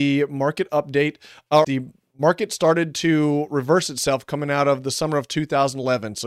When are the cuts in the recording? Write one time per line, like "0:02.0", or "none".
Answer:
0:01.6